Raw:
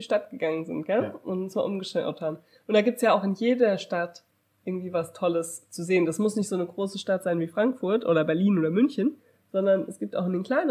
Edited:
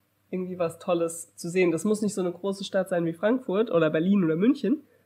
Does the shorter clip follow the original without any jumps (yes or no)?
yes